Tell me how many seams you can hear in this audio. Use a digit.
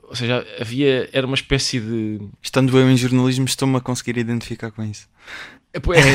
1